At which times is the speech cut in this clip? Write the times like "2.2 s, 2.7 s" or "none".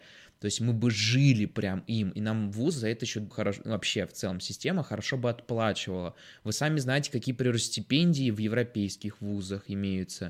3.3 s